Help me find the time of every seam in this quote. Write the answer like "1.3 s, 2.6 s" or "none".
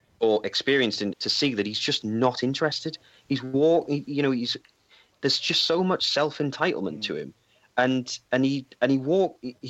1.1 s